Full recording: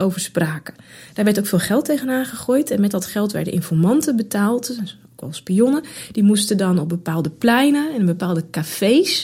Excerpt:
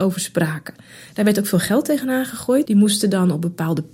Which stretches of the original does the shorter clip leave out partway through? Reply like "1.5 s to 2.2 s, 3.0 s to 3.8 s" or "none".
2.6 s to 6.1 s